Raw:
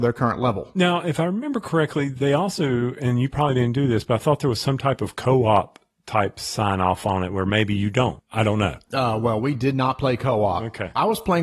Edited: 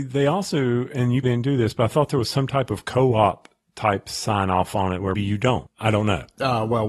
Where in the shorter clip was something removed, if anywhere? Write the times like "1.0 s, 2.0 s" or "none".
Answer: 1.2 s, 5.1 s